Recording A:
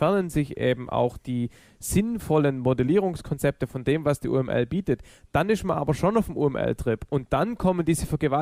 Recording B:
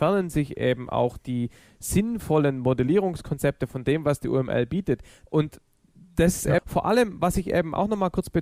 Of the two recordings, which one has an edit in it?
B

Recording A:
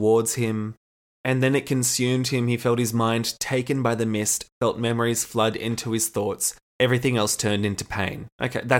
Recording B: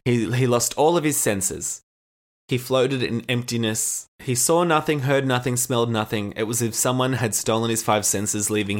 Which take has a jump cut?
B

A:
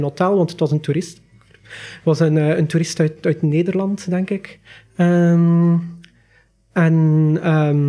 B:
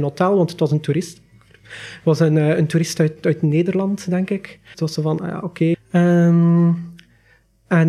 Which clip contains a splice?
B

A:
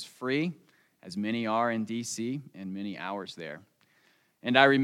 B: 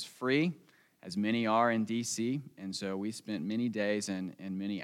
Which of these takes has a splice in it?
A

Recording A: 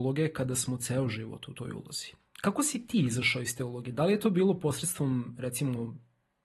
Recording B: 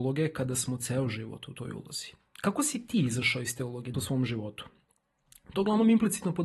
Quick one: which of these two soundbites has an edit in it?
B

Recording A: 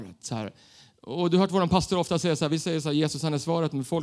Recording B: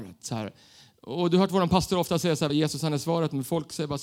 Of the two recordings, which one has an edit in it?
B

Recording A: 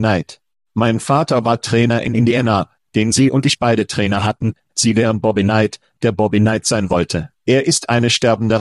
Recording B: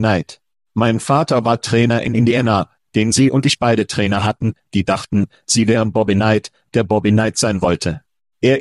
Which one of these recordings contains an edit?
A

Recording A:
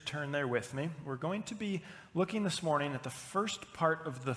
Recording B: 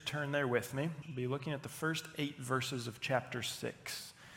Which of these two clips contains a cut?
B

